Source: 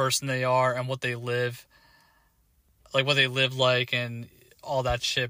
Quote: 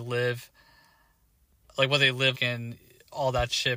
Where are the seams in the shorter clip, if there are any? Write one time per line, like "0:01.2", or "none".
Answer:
0:02.3